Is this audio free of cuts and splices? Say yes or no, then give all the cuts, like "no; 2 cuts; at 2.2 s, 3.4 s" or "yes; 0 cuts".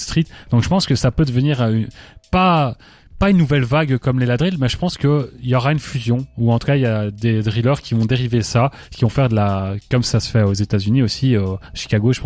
yes; 0 cuts